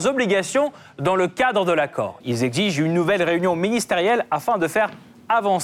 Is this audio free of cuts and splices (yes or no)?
no